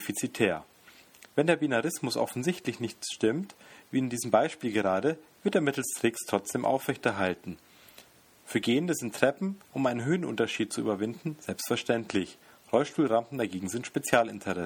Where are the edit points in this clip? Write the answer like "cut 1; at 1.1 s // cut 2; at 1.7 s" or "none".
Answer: none